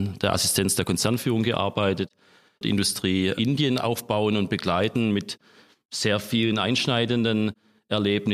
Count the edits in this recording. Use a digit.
1